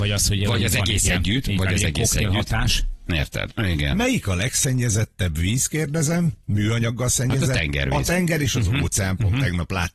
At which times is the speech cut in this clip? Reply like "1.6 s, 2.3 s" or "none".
3.5 s